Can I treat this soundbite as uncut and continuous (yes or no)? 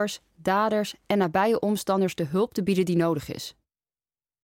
yes